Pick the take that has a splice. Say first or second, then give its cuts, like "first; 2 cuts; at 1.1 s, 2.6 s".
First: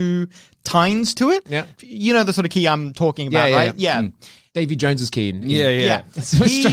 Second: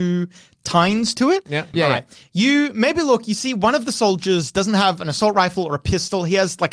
second; 1 cut; at 1.7 s